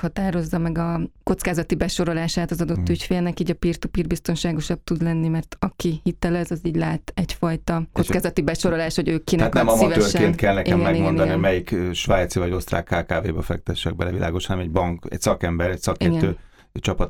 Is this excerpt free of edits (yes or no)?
yes